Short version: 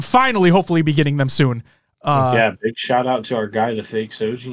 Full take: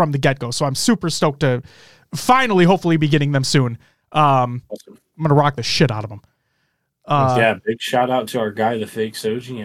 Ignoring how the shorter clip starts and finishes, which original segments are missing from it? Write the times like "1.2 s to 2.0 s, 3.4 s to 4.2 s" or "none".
4.1 s to 7.0 s